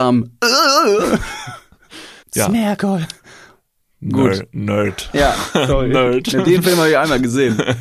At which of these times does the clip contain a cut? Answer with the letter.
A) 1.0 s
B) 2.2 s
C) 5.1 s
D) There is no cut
B